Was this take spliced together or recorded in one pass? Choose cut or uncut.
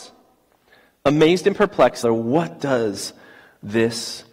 cut